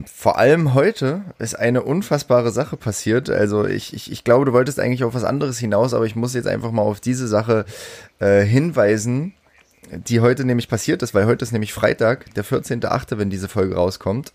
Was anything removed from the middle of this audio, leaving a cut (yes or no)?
no